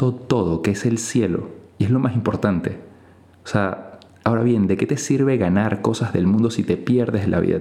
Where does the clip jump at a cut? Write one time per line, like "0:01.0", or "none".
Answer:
none